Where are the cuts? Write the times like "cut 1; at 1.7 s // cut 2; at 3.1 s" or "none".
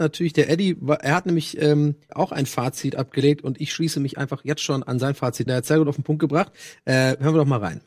cut 1; at 2.1 s // cut 2; at 5.5 s